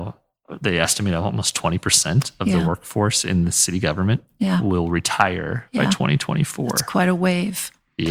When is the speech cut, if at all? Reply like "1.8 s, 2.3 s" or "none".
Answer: none